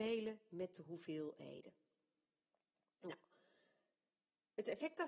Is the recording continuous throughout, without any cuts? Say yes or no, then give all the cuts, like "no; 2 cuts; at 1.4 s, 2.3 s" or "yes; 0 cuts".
yes; 0 cuts